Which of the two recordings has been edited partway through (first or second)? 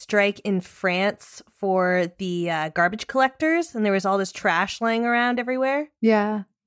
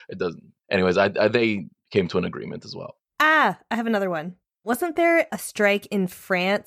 second